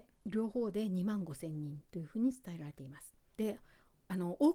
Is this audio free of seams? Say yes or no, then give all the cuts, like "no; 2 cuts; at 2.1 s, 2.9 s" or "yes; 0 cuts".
no; 1 cut; at 3.3 s